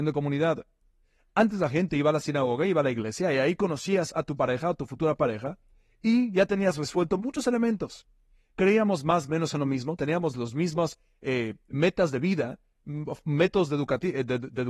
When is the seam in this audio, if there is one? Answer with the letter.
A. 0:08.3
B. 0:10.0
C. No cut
B